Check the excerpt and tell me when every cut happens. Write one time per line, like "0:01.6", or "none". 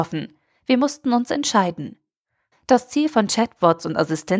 0:02.5